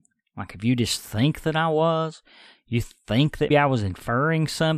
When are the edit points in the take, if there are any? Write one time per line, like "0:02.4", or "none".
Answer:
0:03.5